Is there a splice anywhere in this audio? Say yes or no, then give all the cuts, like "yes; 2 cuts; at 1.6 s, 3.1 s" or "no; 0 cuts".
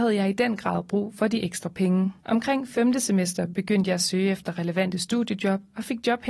yes; 1 cut; at 2.2 s